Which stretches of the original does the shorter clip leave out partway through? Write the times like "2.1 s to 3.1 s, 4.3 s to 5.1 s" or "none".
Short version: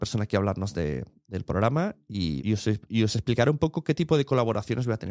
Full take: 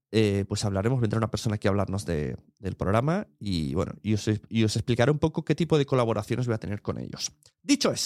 3.7 s to 4.0 s